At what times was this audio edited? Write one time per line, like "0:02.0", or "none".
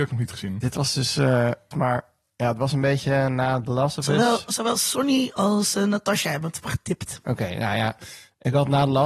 0:01.7